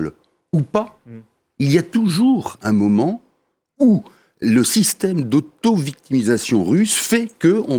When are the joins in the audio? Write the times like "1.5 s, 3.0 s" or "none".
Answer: none